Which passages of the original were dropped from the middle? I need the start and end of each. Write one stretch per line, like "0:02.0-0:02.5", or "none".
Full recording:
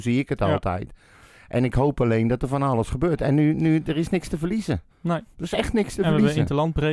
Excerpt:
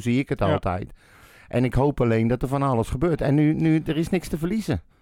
none